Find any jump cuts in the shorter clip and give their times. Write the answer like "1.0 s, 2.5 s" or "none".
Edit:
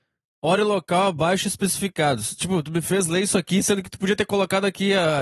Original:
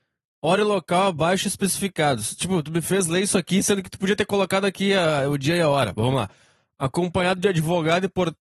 none